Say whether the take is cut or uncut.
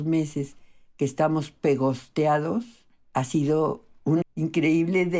cut